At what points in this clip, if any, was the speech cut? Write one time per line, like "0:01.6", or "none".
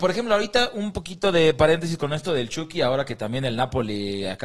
none